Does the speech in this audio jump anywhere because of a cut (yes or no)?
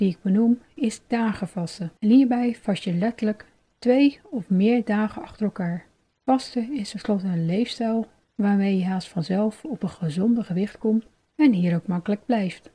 yes